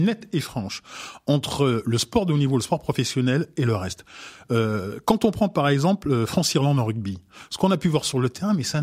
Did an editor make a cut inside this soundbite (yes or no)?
no